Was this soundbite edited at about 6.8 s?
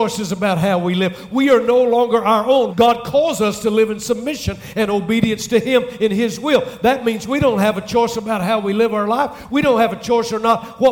no; 2 cuts; at 2.7 s, 9.5 s

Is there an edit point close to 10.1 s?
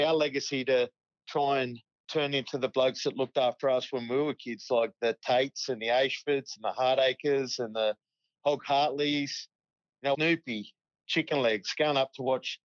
yes; 1 cut; at 10.1 s

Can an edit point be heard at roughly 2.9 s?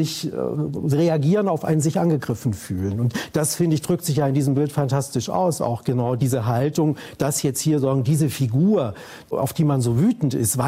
no; 0 cuts

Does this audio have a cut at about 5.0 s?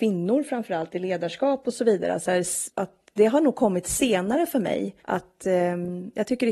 yes; 2 cuts; at 2.7 s, 5.0 s

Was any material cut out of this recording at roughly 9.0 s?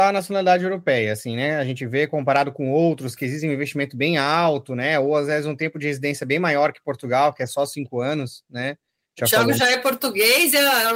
yes; 1 cut; at 9.0 s

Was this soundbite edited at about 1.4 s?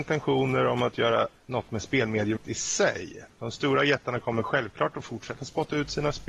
yes; 2 cuts; at 1.4 s, 2.4 s

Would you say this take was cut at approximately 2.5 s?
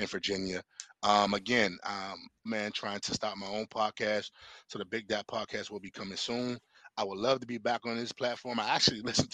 yes; 1 cut; at 2.5 s

